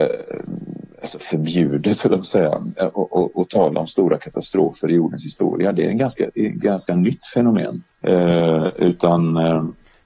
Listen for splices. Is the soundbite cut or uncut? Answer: cut